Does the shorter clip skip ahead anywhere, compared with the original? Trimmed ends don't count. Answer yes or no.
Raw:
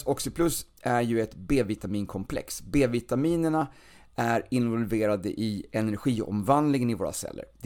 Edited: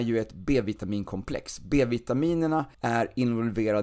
yes